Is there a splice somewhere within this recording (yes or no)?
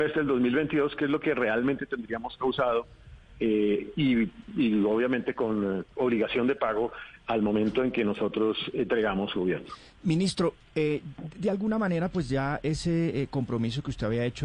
no